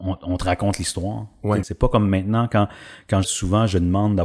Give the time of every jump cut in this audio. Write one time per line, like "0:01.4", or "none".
0:01.6
0:03.2